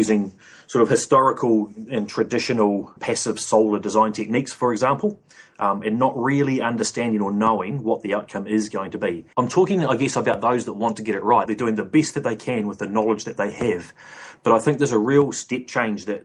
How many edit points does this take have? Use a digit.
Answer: 3